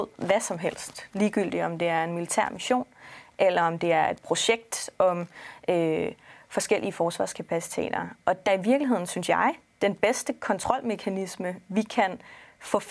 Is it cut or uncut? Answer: cut